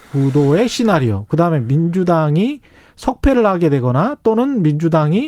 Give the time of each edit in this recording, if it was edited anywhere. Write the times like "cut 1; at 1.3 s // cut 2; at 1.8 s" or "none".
none